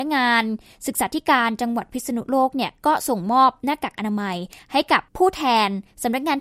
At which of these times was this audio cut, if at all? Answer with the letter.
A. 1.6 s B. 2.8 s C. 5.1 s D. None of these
C